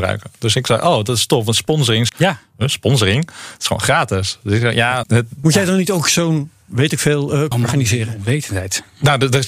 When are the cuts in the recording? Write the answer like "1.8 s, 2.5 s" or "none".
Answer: 2.1 s, 5.0 s, 7.5 s